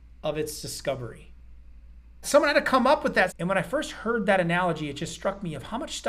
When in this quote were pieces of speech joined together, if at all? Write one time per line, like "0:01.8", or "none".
0:02.2
0:03.3